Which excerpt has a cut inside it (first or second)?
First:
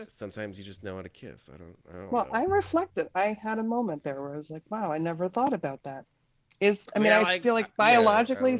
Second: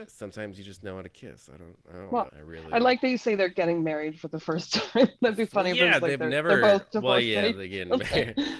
second